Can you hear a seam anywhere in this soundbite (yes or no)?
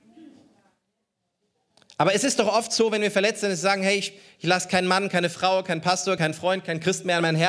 no